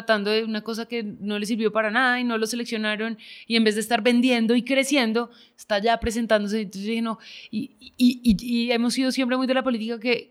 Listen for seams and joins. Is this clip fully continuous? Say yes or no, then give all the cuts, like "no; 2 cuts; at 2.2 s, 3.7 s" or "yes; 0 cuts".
yes; 0 cuts